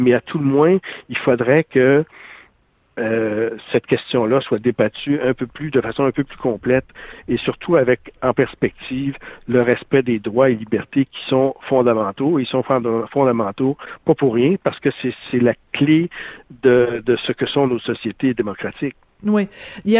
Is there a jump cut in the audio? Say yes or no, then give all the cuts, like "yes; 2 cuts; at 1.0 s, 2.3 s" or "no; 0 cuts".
no; 0 cuts